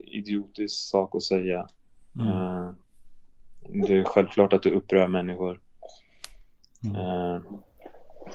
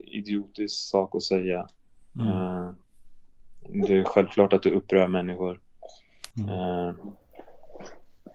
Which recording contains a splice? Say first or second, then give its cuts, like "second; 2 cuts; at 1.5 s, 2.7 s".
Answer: second; 1 cut; at 6.3 s